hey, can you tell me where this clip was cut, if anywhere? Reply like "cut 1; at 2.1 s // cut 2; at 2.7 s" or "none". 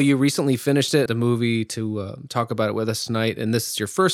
cut 1; at 1.1 s